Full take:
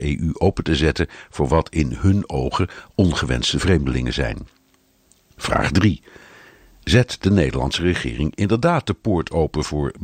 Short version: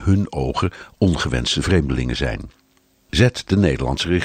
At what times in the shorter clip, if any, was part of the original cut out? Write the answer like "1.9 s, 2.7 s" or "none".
3.1 s